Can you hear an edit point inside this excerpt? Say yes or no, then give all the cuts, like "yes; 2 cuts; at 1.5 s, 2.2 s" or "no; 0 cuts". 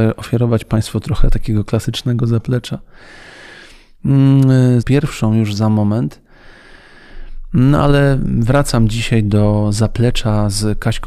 yes; 1 cut; at 4.8 s